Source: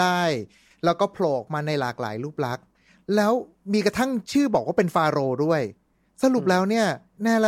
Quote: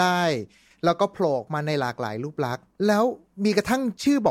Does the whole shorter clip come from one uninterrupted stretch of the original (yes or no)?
no